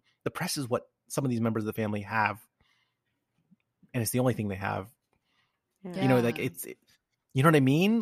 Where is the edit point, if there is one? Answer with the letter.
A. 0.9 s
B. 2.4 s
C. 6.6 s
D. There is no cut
D